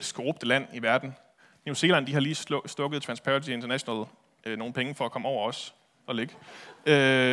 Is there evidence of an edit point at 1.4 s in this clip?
no; 0 cuts

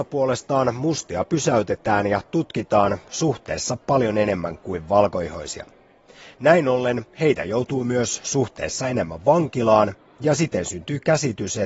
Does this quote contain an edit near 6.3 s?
no; 0 cuts

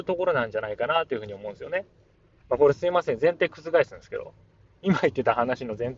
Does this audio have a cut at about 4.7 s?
no; 1 cut; at 2.4 s

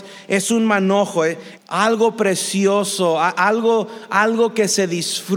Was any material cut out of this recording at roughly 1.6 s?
yes; 1 cut; at 1.6 s

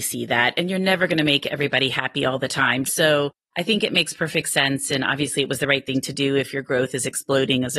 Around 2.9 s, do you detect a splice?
yes; 1 cut; at 2.9 s

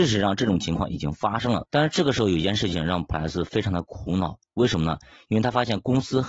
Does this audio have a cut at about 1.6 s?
yes; 1 cut; at 1.6 s

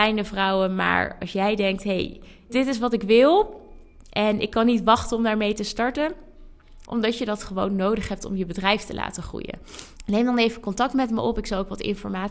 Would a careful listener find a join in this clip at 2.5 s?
yes; 3 cuts; at 2.5 s, 6.8 s, 10.0 s

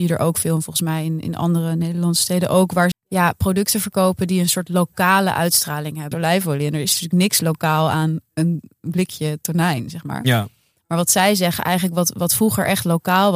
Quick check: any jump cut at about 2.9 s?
yes; 2 cuts; at 2.9 s, 6.1 s

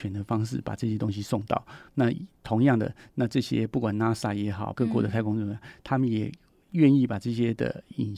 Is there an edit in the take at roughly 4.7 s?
yes; 2 cuts; at 1.9 s, 4.7 s

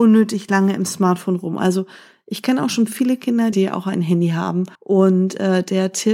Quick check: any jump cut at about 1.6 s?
no; 2 cuts; at 3.5 s, 4.8 s

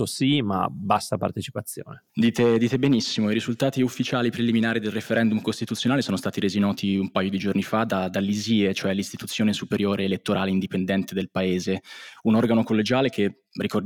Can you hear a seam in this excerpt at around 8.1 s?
no; 1 cut; at 2.1 s

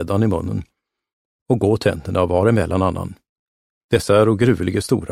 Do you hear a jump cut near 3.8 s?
yes; 1 cut; at 3.8 s

